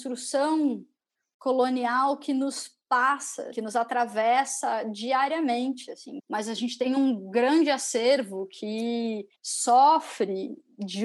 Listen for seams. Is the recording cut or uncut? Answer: cut